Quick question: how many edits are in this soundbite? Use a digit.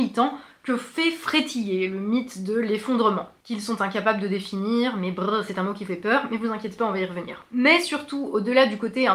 0